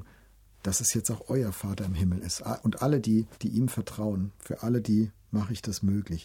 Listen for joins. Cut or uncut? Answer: cut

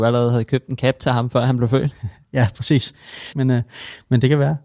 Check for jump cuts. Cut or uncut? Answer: cut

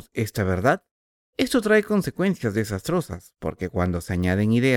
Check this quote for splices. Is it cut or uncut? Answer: cut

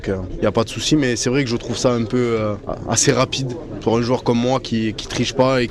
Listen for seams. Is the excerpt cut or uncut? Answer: uncut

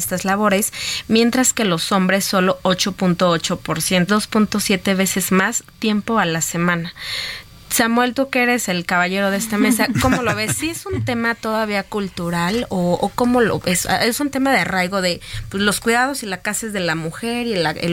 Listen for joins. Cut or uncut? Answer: cut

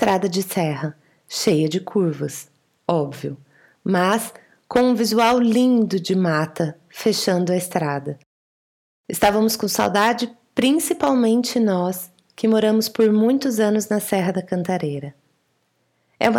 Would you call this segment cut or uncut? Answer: uncut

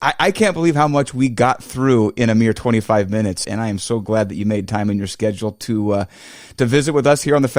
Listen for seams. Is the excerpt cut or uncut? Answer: cut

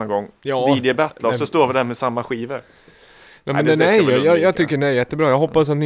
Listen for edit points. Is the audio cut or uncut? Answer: uncut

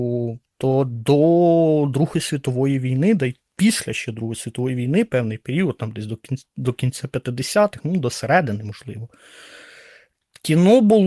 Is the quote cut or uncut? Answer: uncut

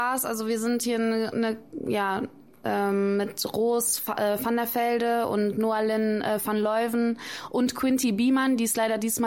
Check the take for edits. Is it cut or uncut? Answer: uncut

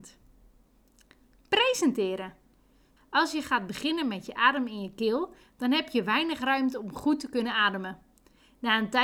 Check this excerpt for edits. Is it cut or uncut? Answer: cut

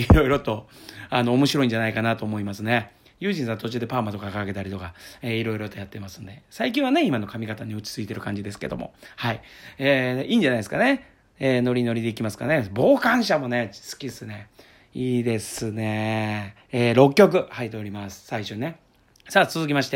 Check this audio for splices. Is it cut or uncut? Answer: cut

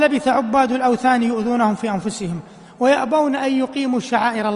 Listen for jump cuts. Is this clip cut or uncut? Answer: uncut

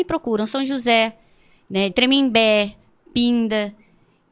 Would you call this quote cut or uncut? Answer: cut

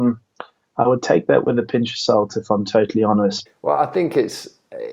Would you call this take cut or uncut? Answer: cut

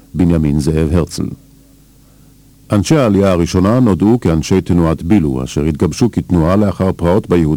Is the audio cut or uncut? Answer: uncut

